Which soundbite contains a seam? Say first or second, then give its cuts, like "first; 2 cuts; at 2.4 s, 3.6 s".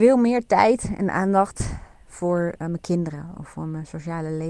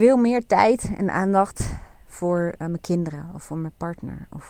first; 1 cut; at 3.3 s